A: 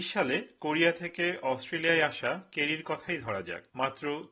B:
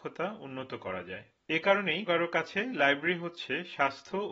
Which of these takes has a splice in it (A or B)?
B